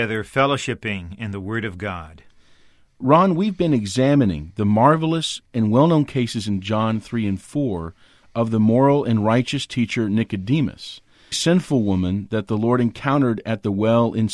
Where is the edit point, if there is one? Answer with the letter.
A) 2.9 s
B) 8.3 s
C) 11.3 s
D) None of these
C